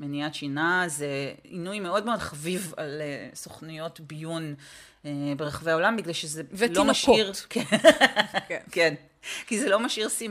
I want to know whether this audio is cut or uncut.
uncut